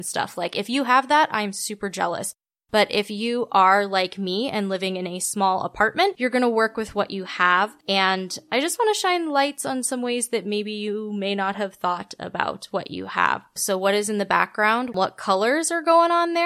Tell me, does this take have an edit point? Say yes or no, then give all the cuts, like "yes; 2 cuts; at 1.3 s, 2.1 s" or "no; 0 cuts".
yes; 2 cuts; at 13.6 s, 14.9 s